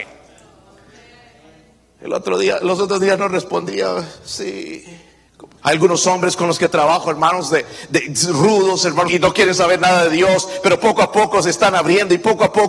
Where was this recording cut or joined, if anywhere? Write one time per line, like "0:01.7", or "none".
0:05.6
0:09.1